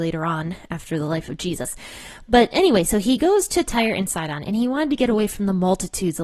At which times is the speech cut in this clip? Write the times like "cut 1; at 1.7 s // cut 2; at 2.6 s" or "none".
none